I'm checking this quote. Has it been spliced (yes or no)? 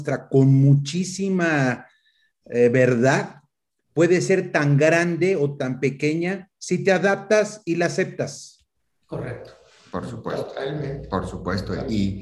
no